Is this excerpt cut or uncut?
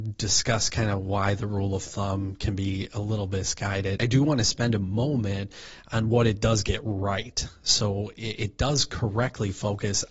cut